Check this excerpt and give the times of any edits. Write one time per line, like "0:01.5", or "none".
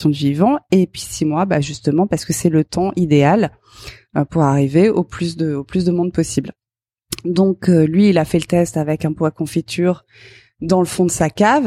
none